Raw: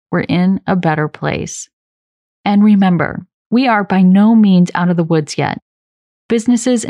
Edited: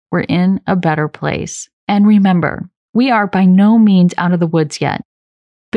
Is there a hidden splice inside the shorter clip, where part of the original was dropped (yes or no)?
yes